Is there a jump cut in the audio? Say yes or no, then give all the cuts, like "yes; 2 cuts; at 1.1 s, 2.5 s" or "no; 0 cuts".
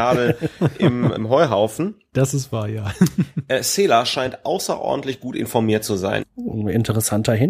yes; 2 cuts; at 1.2 s, 6.2 s